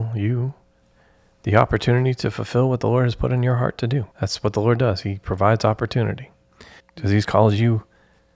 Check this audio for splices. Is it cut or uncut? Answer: cut